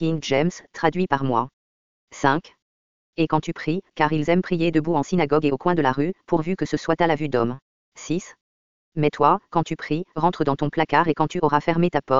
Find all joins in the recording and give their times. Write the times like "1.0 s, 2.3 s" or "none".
3.9 s, 7.8 s